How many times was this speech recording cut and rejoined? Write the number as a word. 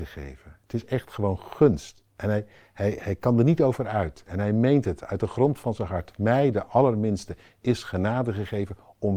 one